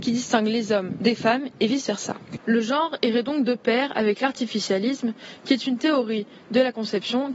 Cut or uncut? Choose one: cut